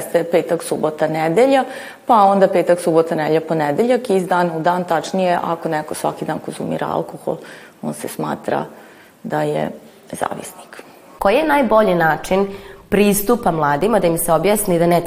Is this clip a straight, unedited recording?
yes; 0 cuts

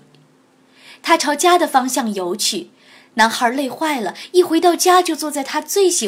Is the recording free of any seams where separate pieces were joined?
yes; 0 cuts

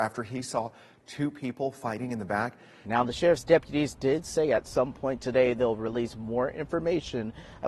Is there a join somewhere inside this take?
yes; 1 cut; at 2.8 s

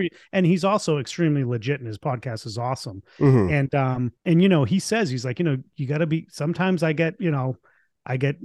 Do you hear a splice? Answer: yes; 1 cut; at 4.2 s

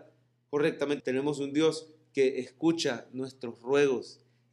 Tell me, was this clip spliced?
yes; 1 cut; at 1.0 s

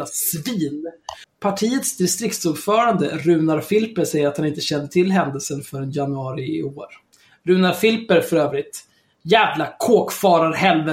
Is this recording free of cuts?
no; 1 cut; at 1.2 s

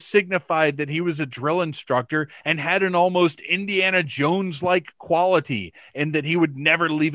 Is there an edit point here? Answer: no; 0 cuts

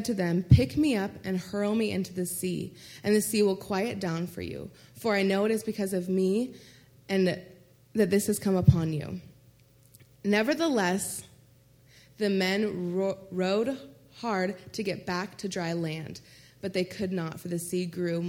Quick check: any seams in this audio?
no; 0 cuts

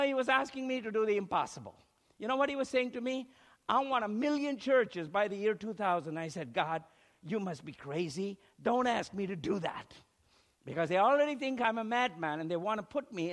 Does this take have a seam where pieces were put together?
no; 0 cuts

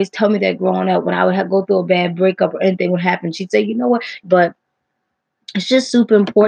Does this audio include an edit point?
yes; 1 cut; at 4.2 s

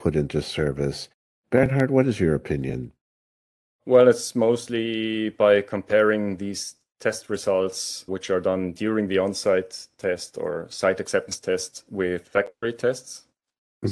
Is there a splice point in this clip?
no; 0 cuts

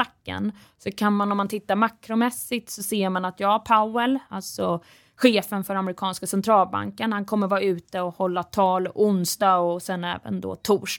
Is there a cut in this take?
no; 0 cuts

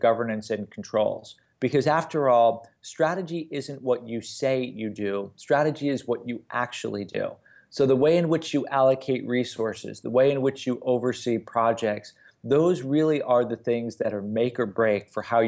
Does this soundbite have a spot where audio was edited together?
no; 0 cuts

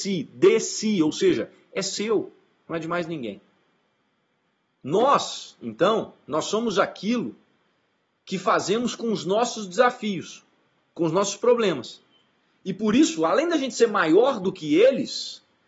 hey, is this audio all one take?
yes; 0 cuts

